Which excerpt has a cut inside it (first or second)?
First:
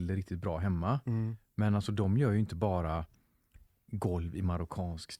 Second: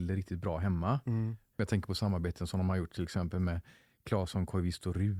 second